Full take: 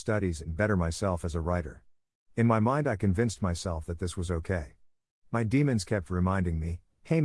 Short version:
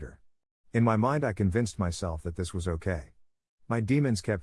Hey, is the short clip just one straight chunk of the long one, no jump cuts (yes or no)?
yes